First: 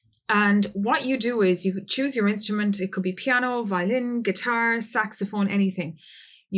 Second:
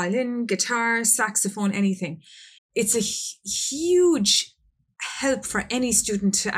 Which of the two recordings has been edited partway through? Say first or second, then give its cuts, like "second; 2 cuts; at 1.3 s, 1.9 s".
second; 1 cut; at 2.6 s